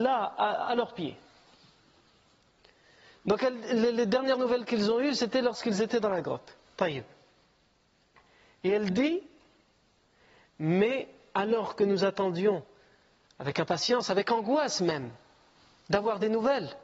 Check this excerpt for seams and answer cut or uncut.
uncut